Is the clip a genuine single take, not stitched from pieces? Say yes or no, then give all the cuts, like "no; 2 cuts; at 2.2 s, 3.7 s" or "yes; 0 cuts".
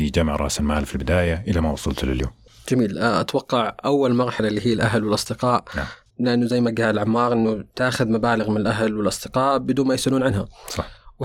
no; 1 cut; at 6.1 s